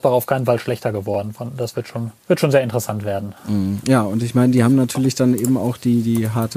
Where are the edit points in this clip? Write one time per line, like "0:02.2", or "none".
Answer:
0:02.2